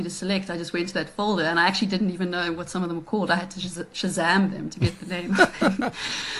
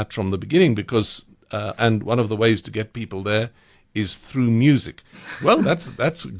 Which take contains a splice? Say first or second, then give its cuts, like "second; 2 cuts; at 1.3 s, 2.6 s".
second; 2 cuts; at 1.8 s, 5.1 s